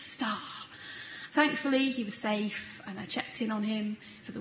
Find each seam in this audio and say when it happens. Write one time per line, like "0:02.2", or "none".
0:01.3